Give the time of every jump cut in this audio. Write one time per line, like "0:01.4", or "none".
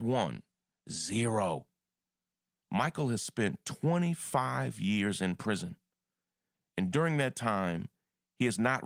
0:02.6